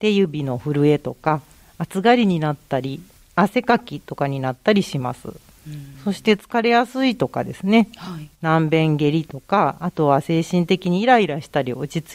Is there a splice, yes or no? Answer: no